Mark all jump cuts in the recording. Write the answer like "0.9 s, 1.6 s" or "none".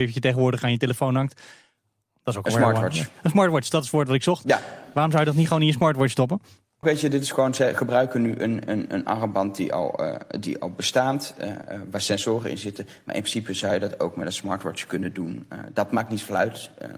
6.8 s